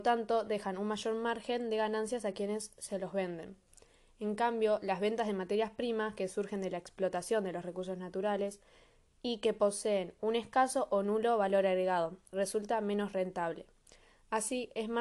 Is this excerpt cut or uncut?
uncut